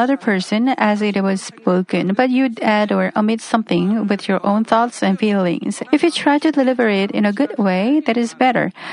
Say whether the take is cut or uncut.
cut